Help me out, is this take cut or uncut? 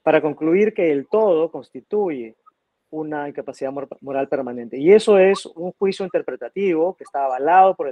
uncut